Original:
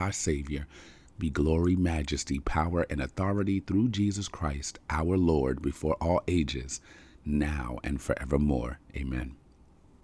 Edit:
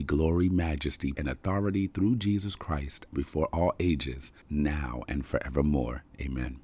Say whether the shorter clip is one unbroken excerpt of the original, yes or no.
no